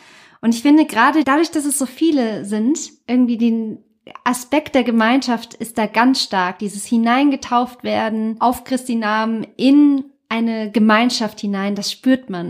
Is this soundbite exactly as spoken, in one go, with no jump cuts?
yes; 0 cuts

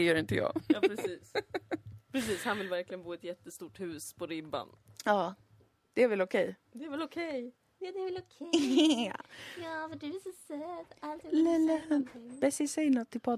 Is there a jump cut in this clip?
no; 0 cuts

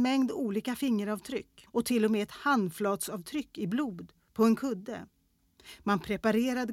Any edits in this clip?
no; 0 cuts

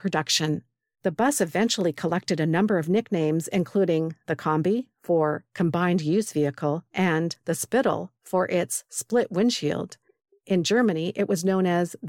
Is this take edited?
no; 0 cuts

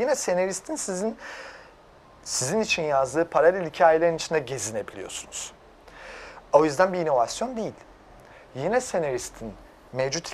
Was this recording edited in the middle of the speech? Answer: no; 0 cuts

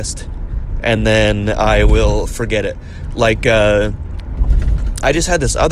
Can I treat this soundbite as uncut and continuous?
yes; 0 cuts

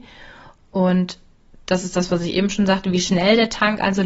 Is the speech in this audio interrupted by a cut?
no; 0 cuts

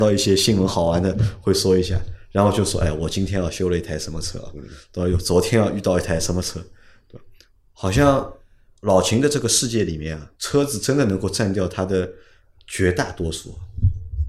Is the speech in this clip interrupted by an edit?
yes; 1 cut; at 10.3 s

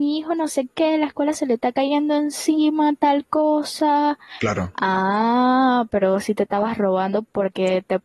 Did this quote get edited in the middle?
no; 0 cuts

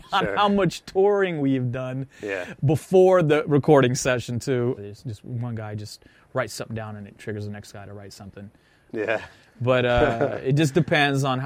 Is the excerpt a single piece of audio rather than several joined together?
no; 2 cuts; at 4.8 s, 8.9 s

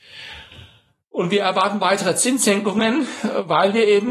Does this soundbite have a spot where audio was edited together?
no; 0 cuts

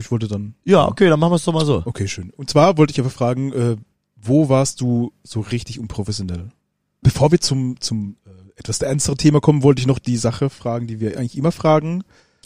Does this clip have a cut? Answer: yes; 1 cut; at 7.0 s

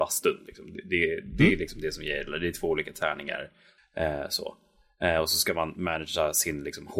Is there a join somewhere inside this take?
yes; 1 cut; at 3.8 s

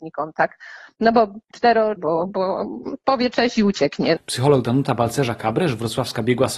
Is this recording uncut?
no; 2 cuts; at 2.0 s, 4.2 s

